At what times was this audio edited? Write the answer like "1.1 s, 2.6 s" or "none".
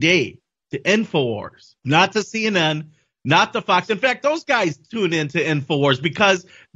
1.8 s